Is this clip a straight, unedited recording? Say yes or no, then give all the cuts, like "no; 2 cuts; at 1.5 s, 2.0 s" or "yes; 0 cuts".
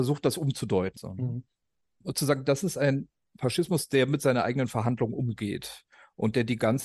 no; 1 cut; at 0.9 s